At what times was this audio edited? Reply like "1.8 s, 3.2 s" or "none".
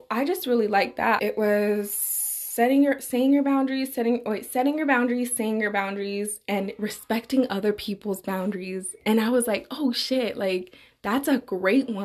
1.2 s